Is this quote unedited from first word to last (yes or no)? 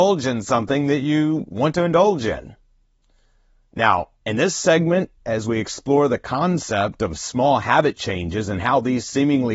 yes